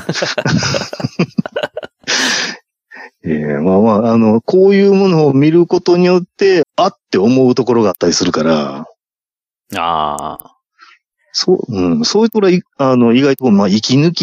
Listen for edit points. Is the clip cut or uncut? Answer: cut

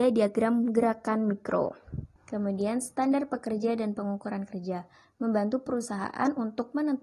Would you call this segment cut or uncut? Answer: cut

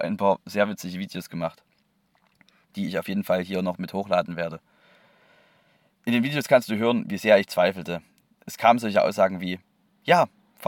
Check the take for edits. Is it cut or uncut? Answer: uncut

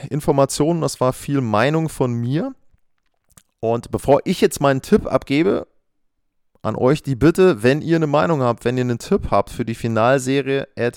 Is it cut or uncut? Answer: uncut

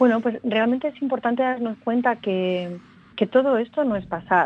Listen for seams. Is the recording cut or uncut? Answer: cut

